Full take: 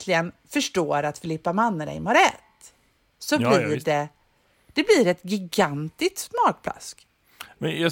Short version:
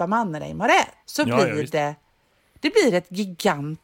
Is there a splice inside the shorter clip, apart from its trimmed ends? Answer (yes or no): yes